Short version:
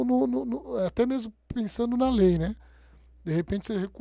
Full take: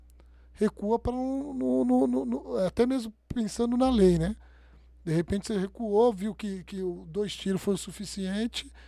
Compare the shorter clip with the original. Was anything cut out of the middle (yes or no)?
no